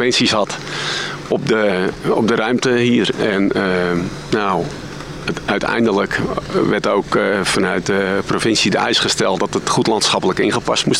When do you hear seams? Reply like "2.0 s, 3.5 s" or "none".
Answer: none